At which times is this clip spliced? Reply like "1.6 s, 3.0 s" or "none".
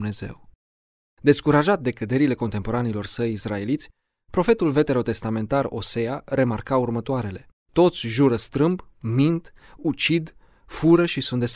7.6 s